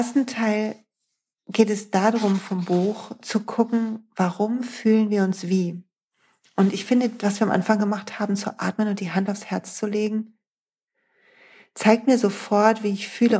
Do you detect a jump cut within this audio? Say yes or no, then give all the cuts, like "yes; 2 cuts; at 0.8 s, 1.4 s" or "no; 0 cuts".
no; 0 cuts